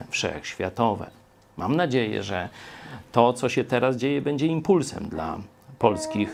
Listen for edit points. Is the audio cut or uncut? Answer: uncut